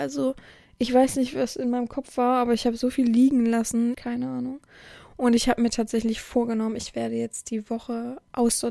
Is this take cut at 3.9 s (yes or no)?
yes